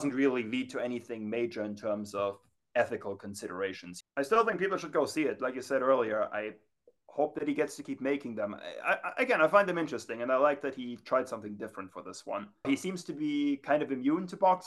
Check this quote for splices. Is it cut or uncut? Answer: cut